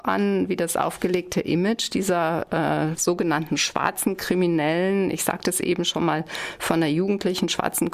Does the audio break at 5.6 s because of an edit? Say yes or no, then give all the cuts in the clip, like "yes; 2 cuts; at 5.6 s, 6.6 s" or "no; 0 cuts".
no; 0 cuts